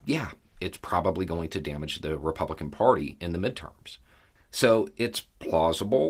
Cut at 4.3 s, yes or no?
yes